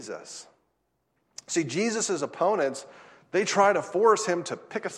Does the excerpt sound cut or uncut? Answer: uncut